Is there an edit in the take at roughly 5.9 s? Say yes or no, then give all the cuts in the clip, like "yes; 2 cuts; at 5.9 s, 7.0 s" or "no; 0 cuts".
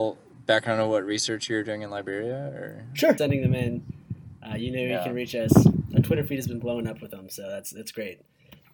no; 1 cut; at 3.2 s